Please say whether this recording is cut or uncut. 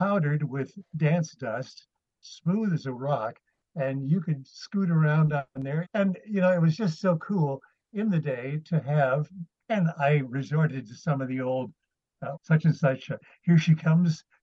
cut